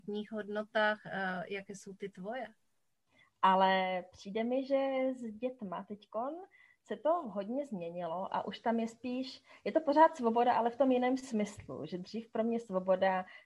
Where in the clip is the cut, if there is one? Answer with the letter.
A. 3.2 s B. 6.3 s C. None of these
A